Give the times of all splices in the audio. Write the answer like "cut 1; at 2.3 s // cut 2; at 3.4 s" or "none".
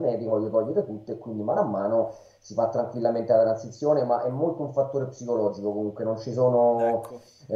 none